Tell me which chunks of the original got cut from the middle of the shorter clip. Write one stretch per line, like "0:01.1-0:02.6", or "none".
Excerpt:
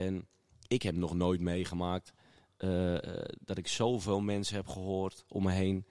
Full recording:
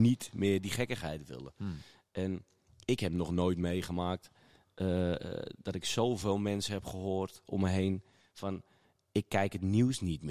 none